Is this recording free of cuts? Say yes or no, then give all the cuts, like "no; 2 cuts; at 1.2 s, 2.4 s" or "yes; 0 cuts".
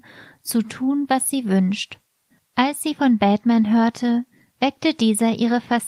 no; 1 cut; at 2.4 s